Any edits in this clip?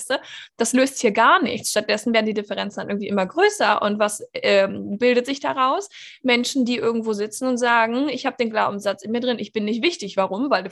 no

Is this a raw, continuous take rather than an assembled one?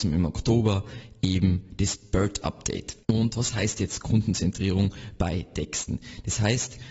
no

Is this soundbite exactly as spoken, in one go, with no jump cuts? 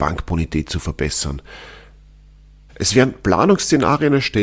no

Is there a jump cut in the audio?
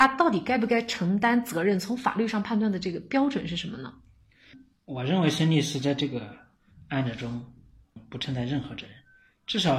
no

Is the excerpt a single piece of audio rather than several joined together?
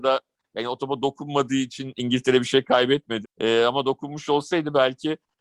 no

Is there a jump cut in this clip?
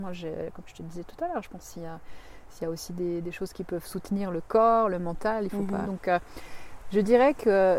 yes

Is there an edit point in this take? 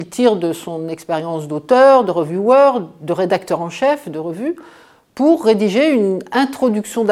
no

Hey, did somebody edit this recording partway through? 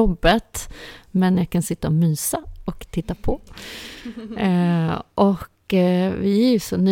no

